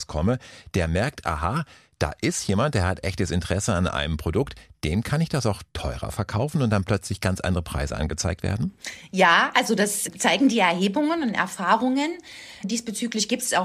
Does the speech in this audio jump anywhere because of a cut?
no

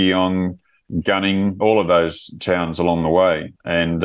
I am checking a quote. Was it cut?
no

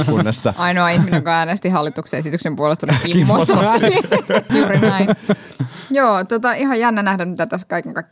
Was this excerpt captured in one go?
no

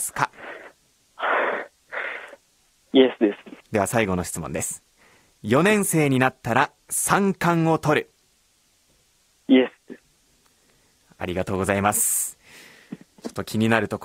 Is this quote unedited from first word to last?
no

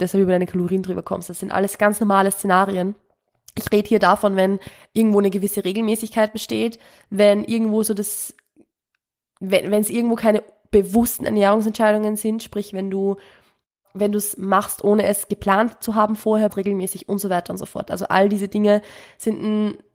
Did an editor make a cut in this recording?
yes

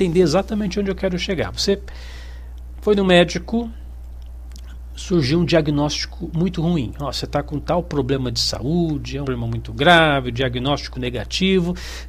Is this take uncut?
no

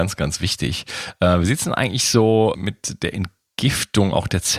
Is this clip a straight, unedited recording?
no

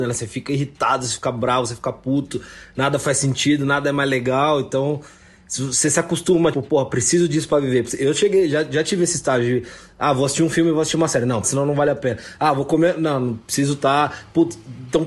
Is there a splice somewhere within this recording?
yes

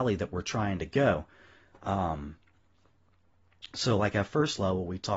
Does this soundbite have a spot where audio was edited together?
no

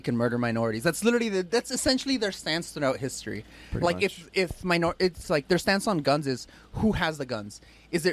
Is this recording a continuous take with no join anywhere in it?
yes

